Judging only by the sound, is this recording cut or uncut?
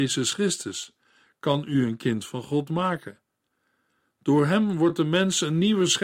uncut